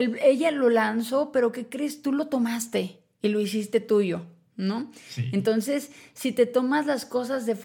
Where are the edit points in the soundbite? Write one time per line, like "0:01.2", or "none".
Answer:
none